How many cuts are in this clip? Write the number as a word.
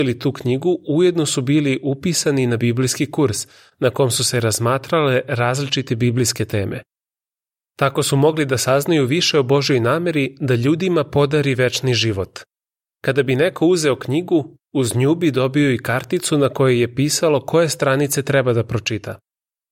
two